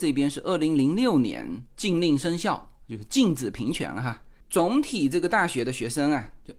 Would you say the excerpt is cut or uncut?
cut